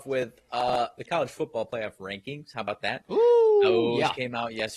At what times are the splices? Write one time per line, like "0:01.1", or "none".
none